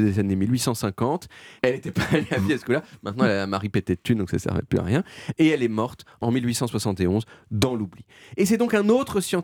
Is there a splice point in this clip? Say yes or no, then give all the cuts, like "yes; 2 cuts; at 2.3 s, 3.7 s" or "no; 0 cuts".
yes; 1 cut; at 1.6 s